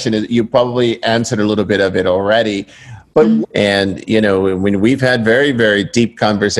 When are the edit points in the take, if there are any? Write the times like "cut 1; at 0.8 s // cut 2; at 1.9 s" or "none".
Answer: cut 1; at 3.4 s